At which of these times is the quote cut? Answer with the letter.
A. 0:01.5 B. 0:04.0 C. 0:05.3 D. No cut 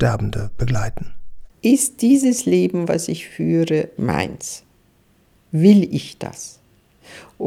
B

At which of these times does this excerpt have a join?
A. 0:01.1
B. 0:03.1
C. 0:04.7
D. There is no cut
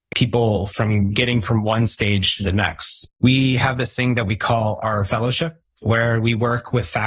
B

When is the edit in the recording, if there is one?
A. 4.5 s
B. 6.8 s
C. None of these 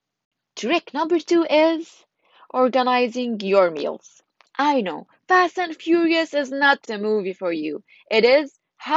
B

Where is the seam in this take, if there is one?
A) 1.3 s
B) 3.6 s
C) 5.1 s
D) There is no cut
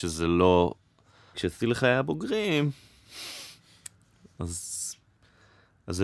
A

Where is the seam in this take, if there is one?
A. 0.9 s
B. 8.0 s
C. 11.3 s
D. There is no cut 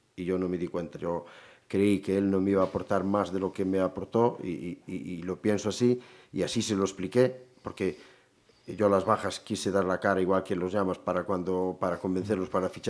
A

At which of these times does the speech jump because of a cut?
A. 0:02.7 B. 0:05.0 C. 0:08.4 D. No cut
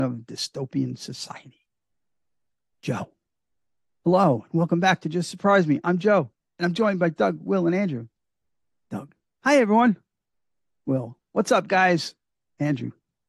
A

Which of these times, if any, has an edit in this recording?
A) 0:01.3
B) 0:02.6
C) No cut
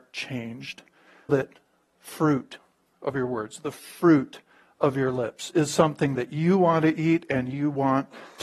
A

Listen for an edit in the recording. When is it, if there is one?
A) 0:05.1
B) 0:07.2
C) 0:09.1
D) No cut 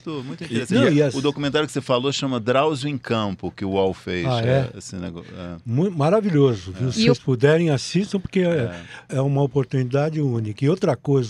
C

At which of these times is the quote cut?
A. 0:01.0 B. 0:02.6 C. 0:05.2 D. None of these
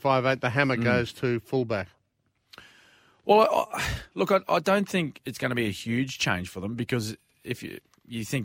C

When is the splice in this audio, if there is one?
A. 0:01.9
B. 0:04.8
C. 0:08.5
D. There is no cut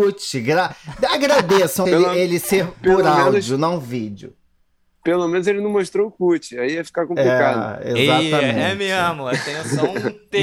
A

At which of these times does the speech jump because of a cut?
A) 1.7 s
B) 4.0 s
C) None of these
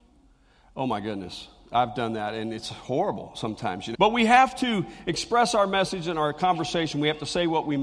B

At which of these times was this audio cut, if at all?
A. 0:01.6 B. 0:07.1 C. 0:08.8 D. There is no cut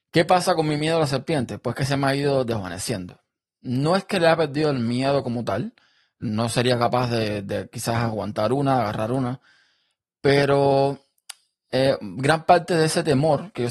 D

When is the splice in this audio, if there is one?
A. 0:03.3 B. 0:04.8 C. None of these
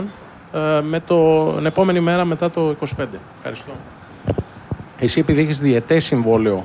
B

